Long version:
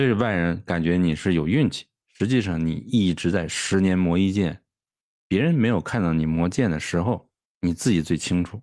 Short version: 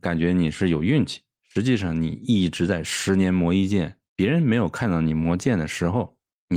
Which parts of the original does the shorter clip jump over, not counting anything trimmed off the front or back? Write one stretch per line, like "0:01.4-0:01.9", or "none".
0:04.7-0:05.2